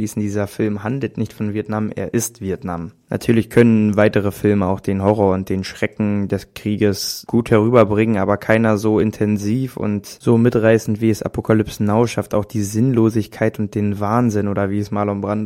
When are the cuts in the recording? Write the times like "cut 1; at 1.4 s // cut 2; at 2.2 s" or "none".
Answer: none